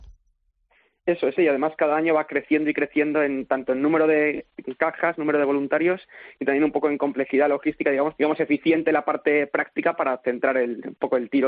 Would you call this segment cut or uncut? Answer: cut